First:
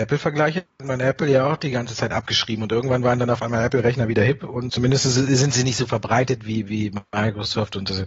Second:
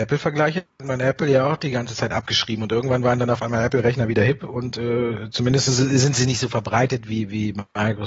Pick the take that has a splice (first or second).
first